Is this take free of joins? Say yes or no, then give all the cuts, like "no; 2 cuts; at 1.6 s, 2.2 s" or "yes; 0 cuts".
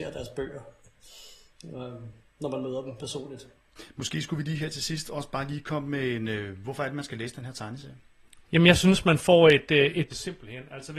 no; 2 cuts; at 8.4 s, 10.1 s